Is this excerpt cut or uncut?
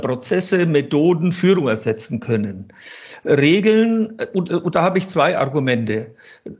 uncut